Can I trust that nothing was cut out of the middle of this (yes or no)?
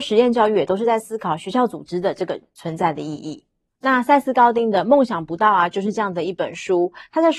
yes